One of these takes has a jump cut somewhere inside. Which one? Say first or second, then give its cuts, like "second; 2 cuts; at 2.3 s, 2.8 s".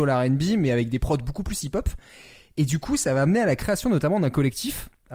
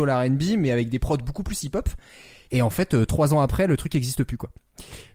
second; 1 cut; at 2.5 s